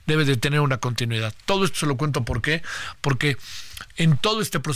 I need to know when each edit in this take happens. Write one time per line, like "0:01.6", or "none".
none